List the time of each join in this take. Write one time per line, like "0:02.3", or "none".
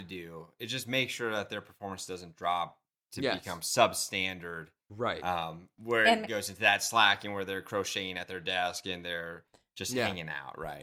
none